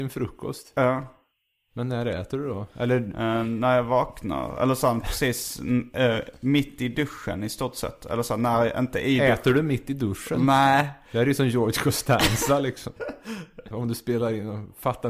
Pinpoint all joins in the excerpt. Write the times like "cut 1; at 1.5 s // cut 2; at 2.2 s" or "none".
cut 1; at 13.7 s